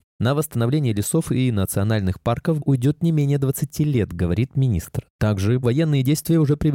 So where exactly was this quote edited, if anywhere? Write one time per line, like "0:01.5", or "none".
0:02.6
0:05.6